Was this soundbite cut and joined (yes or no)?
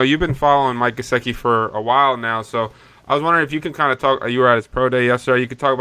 no